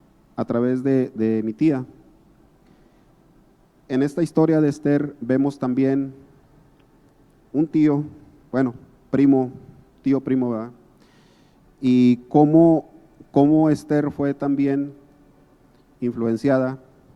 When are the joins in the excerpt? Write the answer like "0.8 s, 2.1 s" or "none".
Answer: 11.6 s